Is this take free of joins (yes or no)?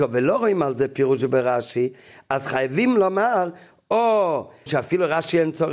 no